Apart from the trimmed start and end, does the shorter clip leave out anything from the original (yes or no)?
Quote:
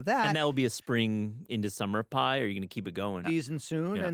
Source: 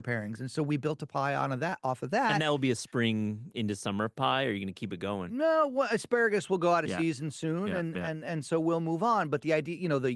yes